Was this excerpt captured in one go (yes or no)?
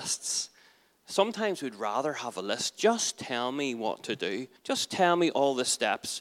no